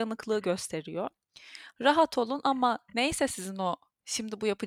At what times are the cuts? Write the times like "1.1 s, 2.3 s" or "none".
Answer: 1.7 s